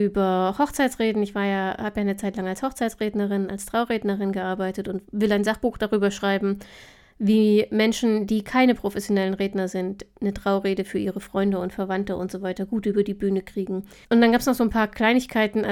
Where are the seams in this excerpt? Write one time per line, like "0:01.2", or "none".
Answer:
0:14.0